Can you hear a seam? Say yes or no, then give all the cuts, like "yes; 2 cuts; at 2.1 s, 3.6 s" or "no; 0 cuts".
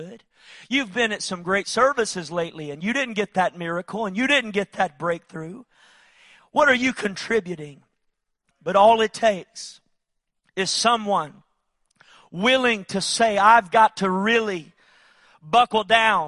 yes; 1 cut; at 8.5 s